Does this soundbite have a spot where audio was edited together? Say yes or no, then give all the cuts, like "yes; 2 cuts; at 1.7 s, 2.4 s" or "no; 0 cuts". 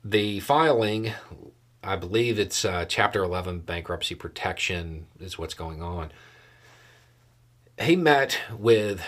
no; 0 cuts